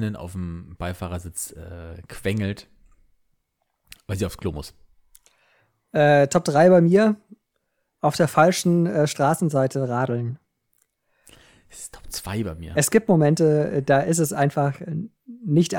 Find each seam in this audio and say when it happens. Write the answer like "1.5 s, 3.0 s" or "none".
none